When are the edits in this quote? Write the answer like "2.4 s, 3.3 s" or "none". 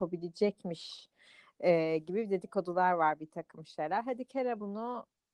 none